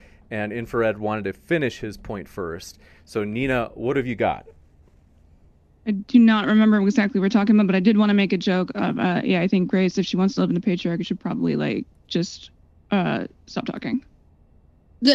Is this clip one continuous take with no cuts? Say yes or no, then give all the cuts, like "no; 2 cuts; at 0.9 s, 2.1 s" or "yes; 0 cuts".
yes; 0 cuts